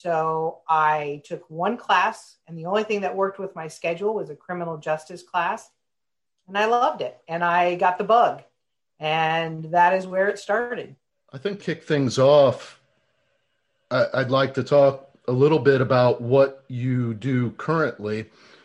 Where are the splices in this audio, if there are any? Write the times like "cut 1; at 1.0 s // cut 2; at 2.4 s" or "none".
cut 1; at 11.6 s